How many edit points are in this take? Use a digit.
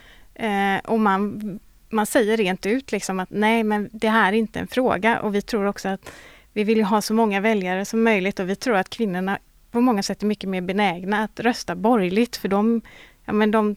0